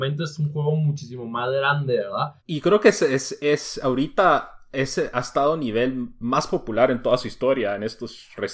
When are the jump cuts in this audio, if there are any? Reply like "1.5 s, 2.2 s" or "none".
2.4 s